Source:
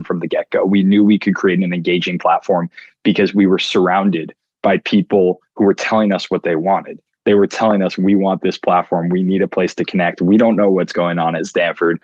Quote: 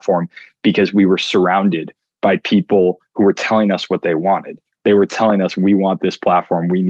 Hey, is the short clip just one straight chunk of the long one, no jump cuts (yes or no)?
yes